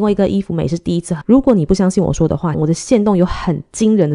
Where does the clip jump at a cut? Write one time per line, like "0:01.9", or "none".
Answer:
0:01.2
0:02.5

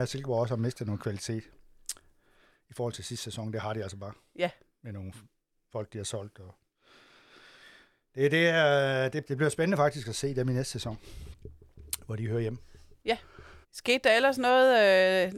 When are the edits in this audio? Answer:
0:09.3
0:13.6

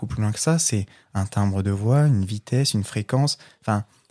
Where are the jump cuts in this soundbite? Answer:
none

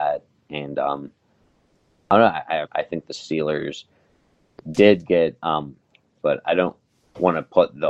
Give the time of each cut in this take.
0:02.6
0:06.2

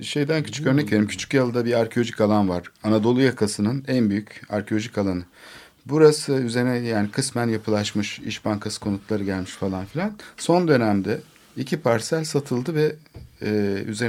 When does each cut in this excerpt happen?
none

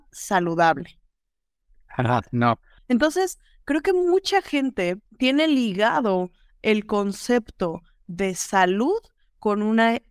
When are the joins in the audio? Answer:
0:02.8
0:05.1

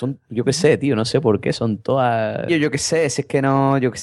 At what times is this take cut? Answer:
0:02.5

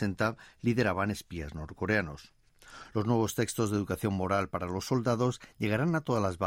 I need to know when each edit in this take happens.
none

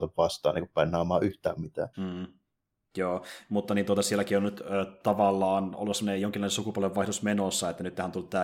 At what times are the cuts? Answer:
0:01.9

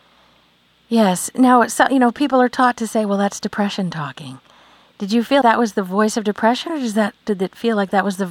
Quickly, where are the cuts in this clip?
0:05.4

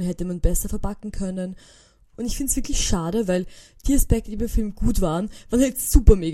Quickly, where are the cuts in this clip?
0:02.1

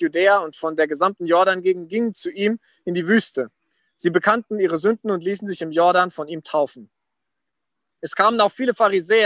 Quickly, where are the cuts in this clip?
none

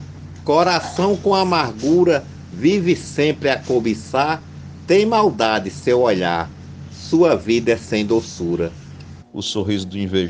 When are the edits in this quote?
0:09.2

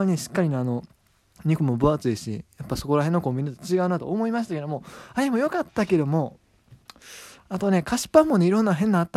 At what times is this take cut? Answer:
none

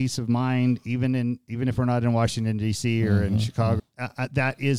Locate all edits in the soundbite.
0:03.8

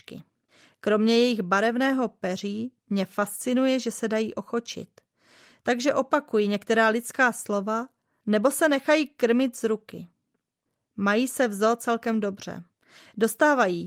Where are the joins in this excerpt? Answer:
none

